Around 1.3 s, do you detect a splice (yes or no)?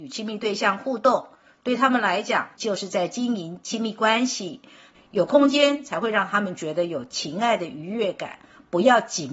no